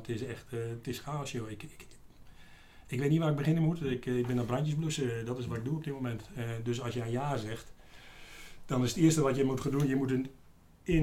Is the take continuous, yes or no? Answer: yes